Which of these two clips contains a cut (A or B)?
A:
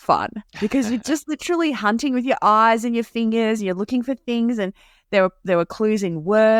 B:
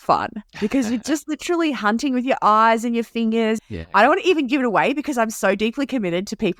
B